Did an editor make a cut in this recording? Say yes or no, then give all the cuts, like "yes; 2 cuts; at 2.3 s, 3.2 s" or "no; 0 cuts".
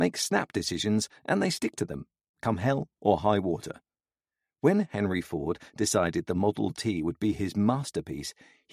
no; 0 cuts